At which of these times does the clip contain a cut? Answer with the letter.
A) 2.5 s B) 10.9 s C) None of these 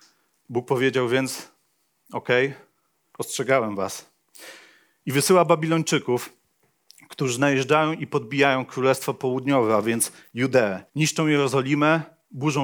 B